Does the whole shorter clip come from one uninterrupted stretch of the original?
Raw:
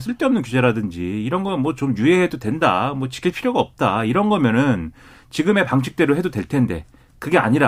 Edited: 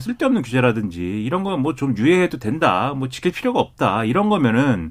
yes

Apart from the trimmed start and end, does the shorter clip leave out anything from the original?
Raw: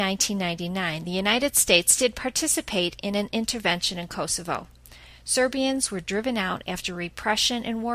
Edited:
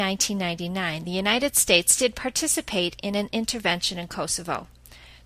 no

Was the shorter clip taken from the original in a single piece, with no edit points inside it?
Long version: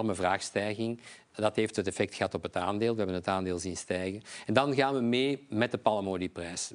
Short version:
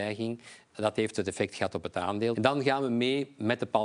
no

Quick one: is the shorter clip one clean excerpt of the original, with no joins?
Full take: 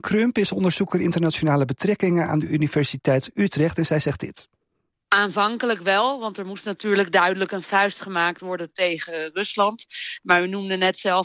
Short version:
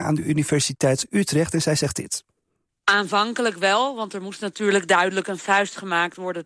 yes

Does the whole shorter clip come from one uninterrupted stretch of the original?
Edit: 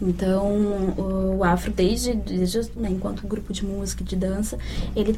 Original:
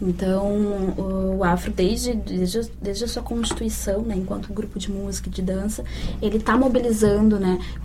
no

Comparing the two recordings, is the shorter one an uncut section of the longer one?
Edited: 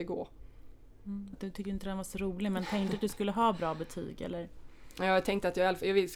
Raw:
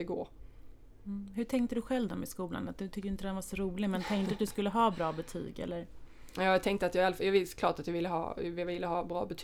no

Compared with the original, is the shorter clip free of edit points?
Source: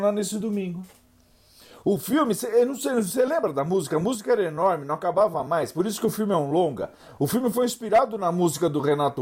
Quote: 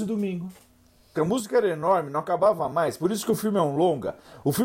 no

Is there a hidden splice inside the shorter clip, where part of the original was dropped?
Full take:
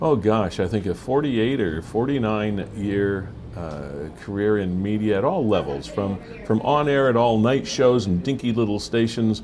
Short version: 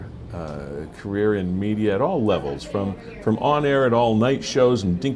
no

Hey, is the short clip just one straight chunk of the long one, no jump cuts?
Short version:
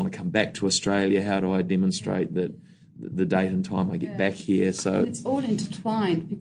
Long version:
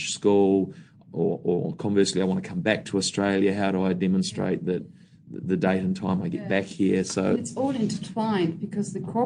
yes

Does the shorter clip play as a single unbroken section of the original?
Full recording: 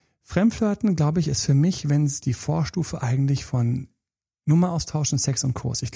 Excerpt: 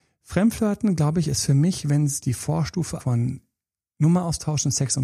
no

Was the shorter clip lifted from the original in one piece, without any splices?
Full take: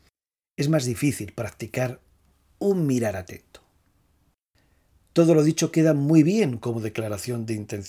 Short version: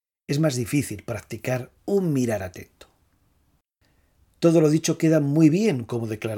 no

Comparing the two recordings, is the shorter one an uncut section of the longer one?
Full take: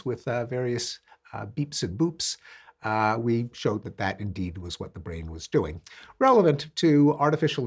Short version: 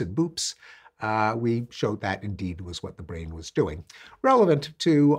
no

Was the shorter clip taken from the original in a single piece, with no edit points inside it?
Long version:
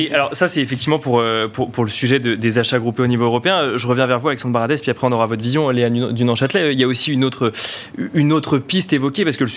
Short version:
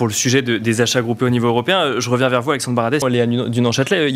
no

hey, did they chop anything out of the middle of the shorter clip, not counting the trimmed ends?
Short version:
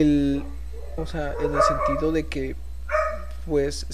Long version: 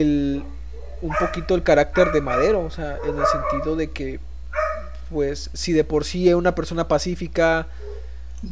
yes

